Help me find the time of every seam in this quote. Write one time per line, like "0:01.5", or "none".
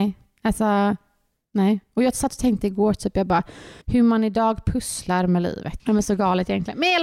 0:03.8
0:05.8